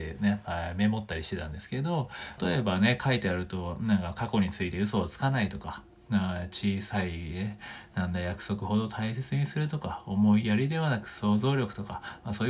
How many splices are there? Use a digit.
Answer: 1